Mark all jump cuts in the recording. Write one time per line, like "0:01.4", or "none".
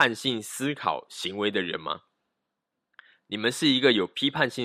none